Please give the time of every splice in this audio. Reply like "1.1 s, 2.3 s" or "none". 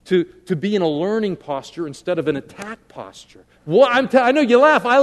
3.5 s